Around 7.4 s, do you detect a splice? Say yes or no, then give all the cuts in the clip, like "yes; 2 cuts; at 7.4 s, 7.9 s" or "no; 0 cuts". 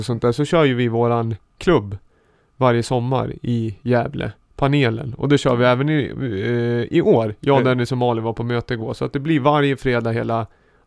no; 0 cuts